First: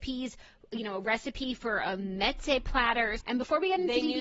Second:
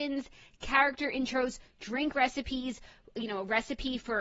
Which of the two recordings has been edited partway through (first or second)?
first